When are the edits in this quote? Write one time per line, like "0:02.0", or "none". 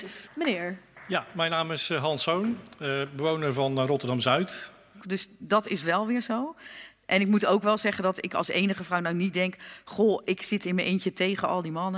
0:05.0